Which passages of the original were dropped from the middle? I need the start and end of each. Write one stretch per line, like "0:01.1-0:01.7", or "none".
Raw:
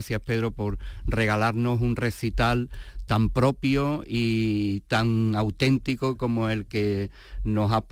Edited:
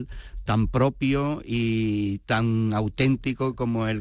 none